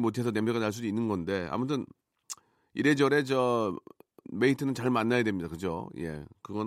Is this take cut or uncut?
cut